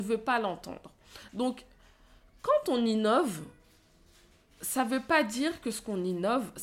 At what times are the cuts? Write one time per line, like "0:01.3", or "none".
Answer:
none